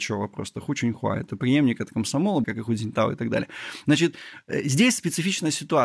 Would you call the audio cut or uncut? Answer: cut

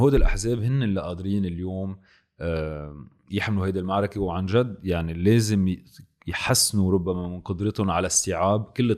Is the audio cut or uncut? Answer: uncut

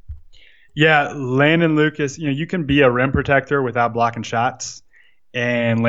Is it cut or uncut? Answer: uncut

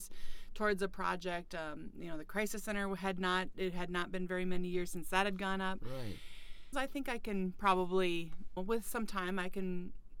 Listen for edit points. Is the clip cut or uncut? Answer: cut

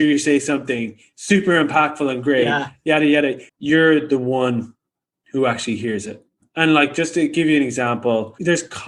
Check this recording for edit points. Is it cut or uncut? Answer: cut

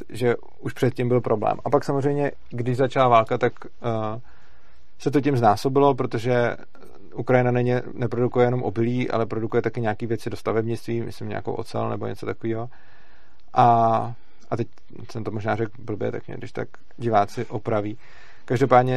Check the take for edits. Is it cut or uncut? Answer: uncut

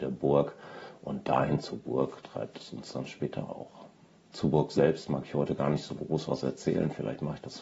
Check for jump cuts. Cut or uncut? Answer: uncut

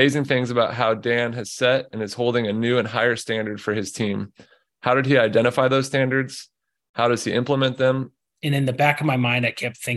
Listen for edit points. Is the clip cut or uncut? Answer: cut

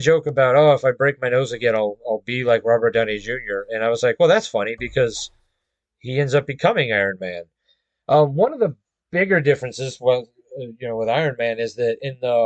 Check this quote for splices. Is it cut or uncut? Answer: uncut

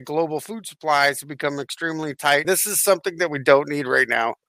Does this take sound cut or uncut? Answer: cut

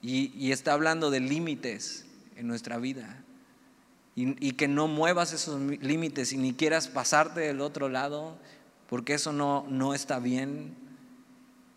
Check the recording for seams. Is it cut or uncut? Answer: uncut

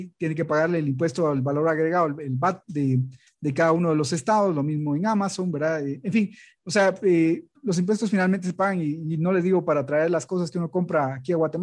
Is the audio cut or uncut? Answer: uncut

